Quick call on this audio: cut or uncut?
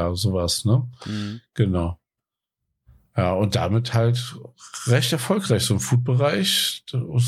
uncut